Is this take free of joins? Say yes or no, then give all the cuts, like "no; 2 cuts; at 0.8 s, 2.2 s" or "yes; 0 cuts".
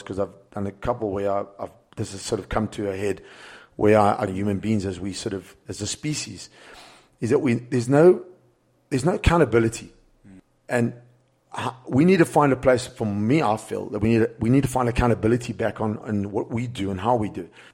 no; 2 cuts; at 4.3 s, 16.0 s